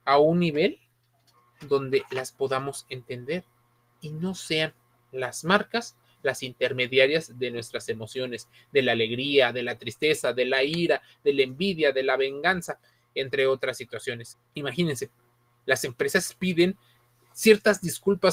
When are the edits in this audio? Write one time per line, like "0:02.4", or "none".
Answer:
0:14.3